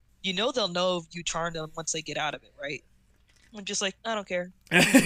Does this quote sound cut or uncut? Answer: cut